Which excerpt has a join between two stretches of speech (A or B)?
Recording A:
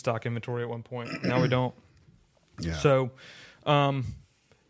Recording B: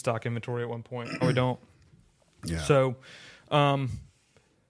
B